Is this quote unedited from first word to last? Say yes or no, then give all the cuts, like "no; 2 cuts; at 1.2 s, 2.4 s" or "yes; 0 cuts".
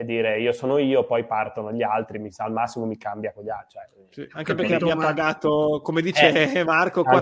yes; 0 cuts